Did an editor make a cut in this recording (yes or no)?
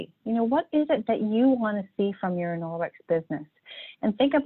no